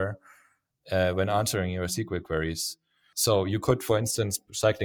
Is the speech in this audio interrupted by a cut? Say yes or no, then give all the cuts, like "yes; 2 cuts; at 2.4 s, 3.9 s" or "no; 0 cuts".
yes; 1 cut; at 3.1 s